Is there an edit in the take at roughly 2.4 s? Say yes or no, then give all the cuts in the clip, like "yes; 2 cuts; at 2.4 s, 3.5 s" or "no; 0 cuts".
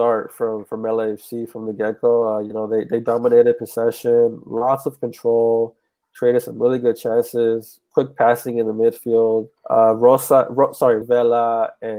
no; 2 cuts; at 9.6 s, 11.0 s